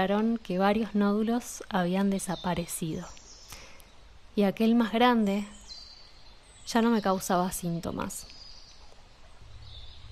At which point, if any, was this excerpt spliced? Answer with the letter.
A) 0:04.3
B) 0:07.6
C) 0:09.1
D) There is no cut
D